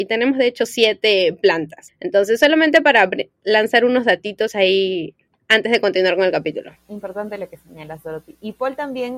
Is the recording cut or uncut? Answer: uncut